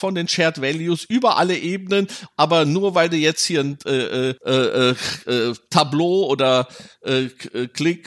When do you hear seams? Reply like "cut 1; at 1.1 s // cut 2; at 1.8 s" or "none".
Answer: cut 1; at 2.3 s